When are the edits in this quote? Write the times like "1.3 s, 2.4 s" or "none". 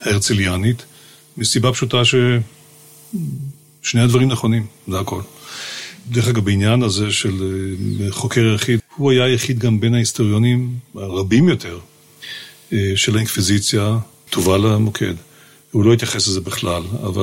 8.8 s, 14.3 s